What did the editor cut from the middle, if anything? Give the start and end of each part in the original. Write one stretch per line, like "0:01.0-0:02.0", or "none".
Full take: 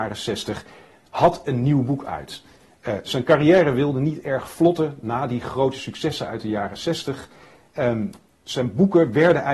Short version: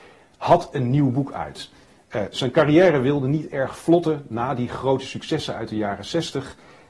none